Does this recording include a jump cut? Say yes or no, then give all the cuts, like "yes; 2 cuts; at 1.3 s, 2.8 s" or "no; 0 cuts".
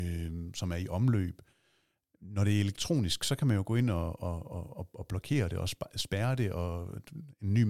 no; 0 cuts